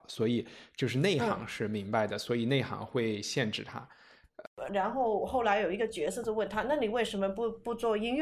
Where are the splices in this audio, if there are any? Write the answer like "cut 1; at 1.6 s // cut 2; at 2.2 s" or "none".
cut 1; at 4.7 s